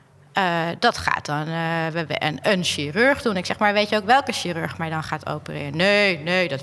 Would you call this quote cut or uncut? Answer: uncut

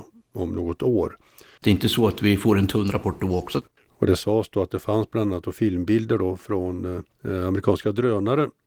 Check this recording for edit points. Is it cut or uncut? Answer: cut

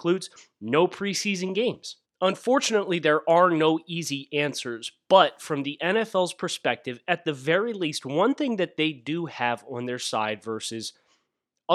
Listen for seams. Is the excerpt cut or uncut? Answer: cut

